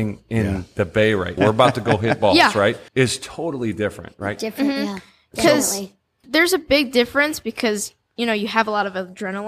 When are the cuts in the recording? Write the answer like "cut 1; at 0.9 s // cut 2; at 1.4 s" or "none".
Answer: cut 1; at 1.4 s // cut 2; at 2.9 s // cut 3; at 6.2 s